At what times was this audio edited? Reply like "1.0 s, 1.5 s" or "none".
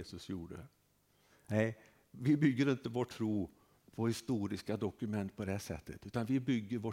none